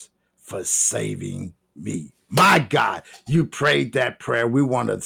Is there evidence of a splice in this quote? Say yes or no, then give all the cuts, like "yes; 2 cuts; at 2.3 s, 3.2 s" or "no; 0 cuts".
no; 0 cuts